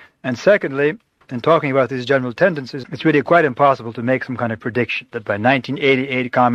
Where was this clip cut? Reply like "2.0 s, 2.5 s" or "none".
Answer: 1.2 s, 2.8 s